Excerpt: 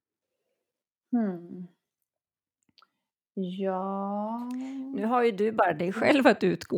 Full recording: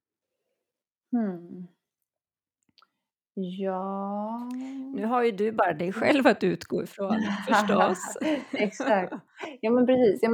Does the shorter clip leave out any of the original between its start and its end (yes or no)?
no